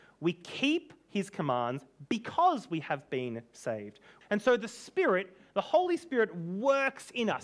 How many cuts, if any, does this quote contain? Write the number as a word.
one